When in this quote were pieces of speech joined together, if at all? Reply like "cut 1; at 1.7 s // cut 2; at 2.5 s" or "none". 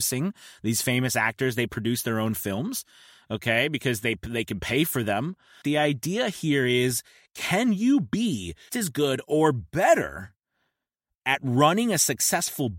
cut 1; at 5.6 s // cut 2; at 8.7 s